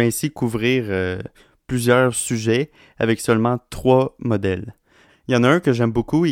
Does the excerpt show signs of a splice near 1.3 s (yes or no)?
no